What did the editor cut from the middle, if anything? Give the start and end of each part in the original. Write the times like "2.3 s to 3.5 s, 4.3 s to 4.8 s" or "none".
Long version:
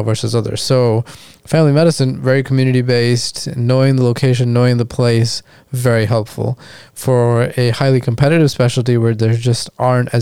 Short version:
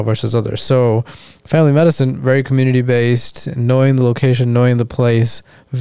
none

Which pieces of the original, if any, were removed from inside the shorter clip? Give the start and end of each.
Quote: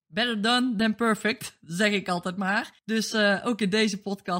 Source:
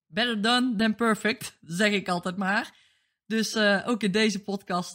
2.8 s to 3.2 s

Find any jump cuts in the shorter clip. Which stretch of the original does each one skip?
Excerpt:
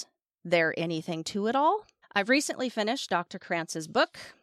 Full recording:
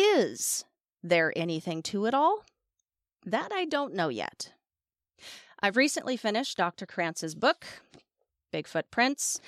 2.6 s to 5.5 s

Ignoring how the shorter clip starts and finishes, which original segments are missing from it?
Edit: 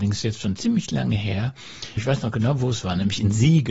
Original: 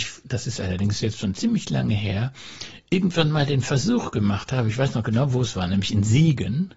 2.8 s to 4.7 s

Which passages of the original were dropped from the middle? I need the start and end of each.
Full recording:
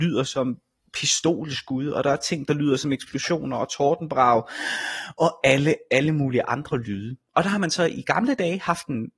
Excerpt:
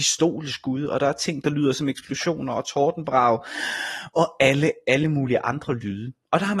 none

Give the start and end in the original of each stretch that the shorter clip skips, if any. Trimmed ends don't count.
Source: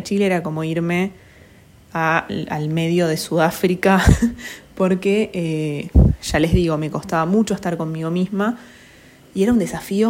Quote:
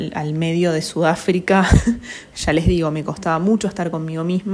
4.7 s to 6.2 s

